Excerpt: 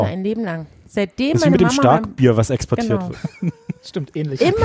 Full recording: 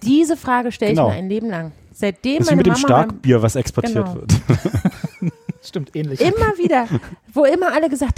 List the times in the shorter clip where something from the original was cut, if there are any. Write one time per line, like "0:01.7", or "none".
0:03.1